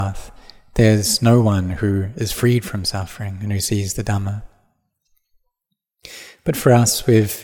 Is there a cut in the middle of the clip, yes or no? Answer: no